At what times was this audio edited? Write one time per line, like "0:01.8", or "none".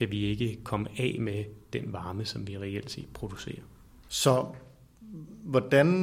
0:04.1